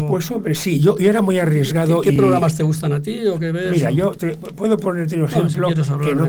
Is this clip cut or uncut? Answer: uncut